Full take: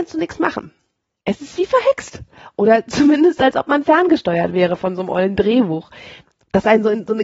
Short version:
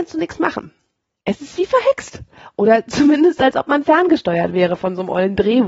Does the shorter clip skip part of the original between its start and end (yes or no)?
no